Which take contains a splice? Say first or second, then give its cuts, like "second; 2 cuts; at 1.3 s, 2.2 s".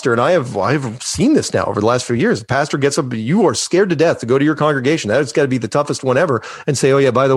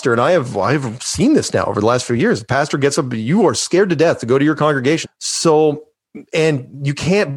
second; 1 cut; at 5.0 s